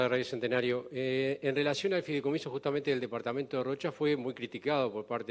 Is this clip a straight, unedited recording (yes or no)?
yes